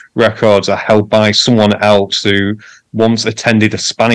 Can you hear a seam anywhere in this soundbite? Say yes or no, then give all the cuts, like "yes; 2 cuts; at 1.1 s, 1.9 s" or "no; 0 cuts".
no; 0 cuts